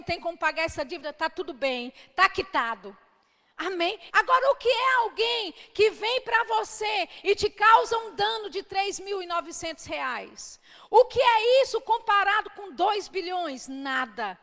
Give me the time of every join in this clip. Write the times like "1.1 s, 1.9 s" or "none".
4.1 s